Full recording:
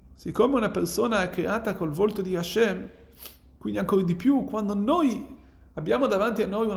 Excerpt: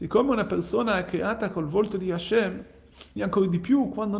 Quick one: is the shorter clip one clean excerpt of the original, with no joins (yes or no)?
no